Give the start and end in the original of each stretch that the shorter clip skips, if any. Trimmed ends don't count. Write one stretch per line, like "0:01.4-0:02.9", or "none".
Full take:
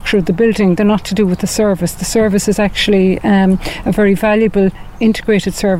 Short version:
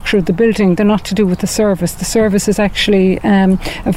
none